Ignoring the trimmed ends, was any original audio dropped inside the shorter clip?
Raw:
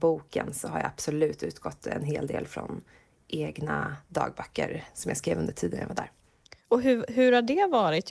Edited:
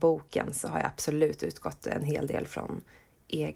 no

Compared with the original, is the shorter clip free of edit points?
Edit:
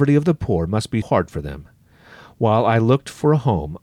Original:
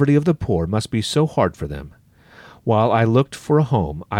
no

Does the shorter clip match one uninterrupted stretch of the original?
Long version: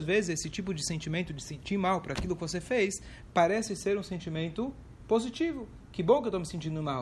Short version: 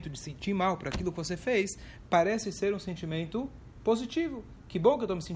yes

